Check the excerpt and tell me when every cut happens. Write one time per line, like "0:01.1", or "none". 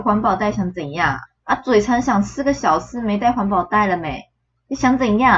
0:01.2